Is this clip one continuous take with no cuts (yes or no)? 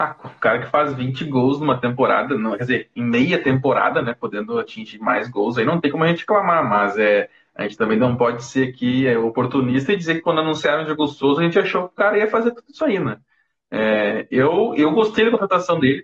yes